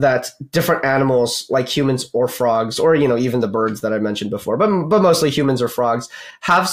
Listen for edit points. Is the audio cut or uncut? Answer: uncut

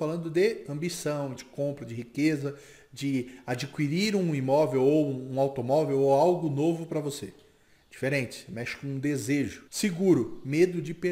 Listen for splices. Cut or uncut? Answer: cut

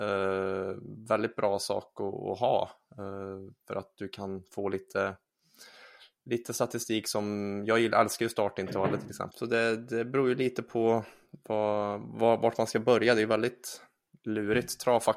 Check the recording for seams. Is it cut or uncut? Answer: cut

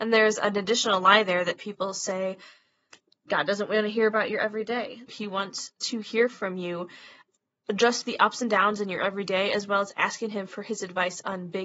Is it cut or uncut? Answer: cut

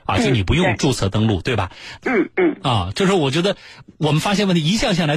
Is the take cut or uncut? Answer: cut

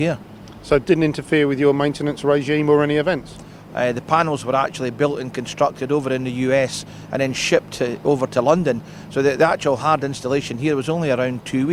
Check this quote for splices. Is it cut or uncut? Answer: cut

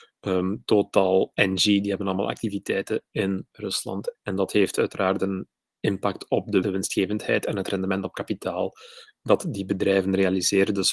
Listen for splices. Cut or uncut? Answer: cut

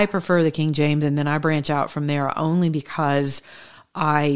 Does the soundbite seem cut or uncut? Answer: uncut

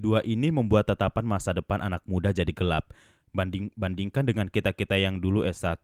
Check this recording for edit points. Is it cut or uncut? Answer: cut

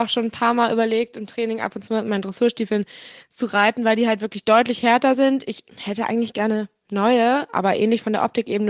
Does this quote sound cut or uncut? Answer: uncut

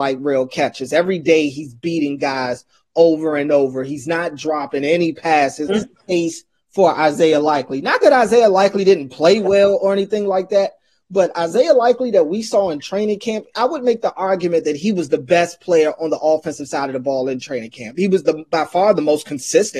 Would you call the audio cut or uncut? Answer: cut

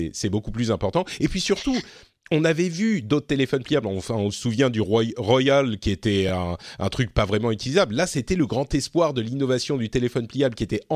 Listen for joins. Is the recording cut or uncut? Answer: uncut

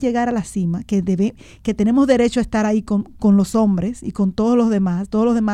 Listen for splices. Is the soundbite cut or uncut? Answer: uncut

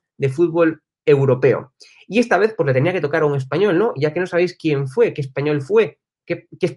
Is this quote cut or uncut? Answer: uncut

